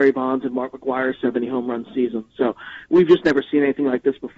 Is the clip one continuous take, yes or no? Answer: yes